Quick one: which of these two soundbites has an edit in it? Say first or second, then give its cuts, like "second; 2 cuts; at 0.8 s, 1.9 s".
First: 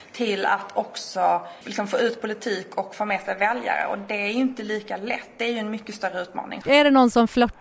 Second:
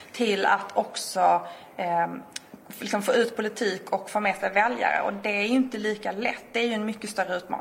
first; 2 cuts; at 1.6 s, 6.6 s